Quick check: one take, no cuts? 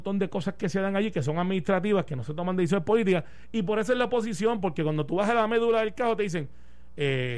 yes; 0 cuts

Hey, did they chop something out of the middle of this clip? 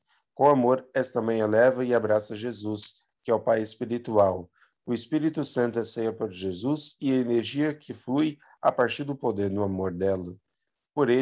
no; 0 cuts

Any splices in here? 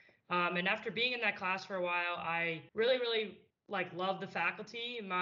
yes; 1 cut; at 2.7 s

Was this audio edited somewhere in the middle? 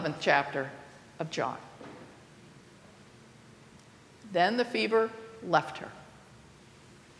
no; 0 cuts

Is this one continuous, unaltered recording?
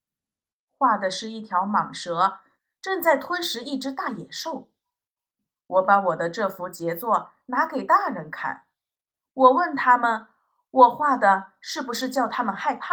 no; 1 cut; at 5.6 s

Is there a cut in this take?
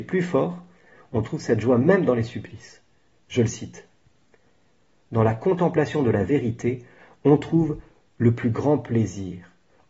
yes; 1 cut; at 3.2 s

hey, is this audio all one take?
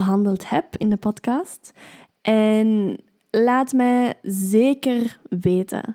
yes; 0 cuts

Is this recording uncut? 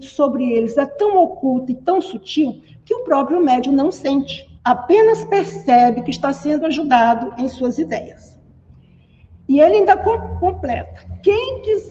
no; 1 cut; at 4.6 s

